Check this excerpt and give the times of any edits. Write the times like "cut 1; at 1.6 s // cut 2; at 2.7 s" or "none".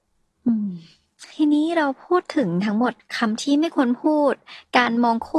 cut 1; at 1.3 s